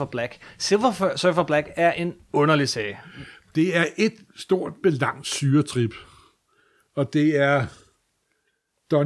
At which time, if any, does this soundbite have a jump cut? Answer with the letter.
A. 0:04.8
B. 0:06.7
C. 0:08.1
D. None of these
A